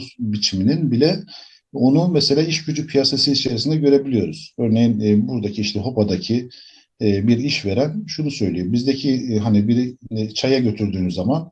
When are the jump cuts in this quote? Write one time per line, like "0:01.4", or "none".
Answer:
none